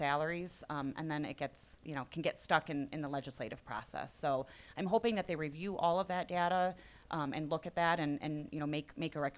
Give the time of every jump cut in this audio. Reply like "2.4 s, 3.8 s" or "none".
none